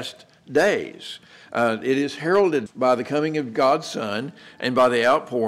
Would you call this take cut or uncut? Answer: cut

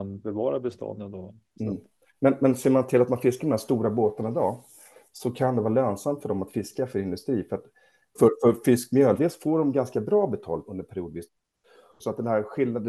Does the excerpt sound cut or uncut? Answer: cut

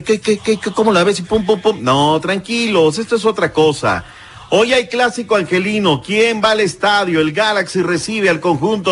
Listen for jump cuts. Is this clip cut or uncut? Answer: uncut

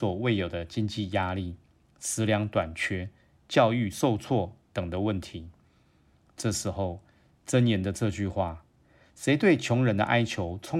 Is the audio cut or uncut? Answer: uncut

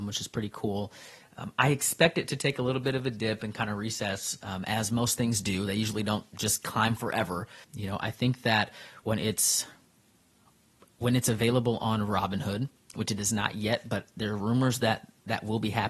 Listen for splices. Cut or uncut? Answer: cut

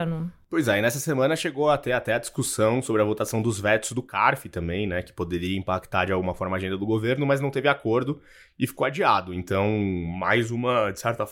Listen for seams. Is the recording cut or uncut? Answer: uncut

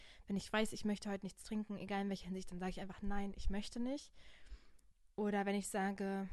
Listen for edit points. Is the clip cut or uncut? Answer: uncut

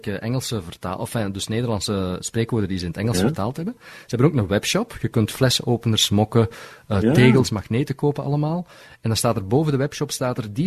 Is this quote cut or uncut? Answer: uncut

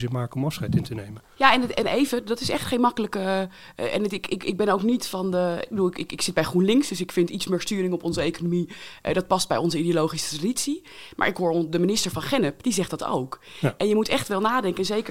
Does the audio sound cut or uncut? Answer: uncut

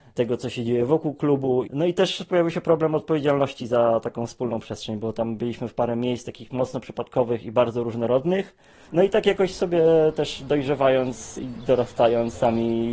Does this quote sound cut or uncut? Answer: cut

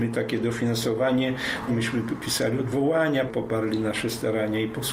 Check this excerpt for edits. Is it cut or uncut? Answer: cut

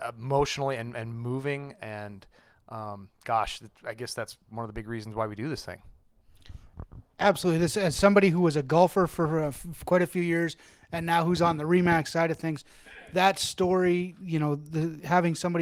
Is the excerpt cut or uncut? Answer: uncut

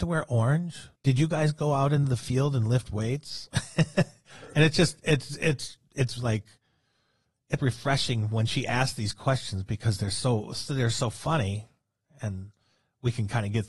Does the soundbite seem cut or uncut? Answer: cut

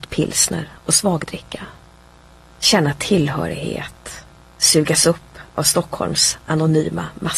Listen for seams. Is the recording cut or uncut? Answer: cut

